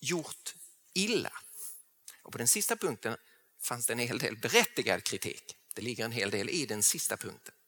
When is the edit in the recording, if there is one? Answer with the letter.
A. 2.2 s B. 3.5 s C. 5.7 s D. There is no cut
D